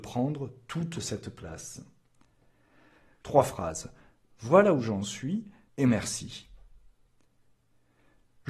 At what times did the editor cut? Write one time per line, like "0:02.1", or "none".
0:03.2
0:05.7